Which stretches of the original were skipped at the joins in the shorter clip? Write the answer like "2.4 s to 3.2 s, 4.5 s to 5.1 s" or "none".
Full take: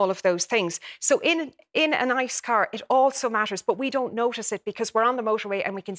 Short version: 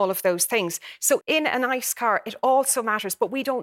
1.2 s to 1.7 s